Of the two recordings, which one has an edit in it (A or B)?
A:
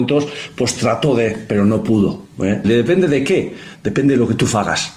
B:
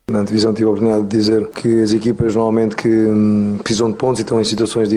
A